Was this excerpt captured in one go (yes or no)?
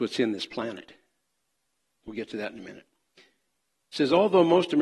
no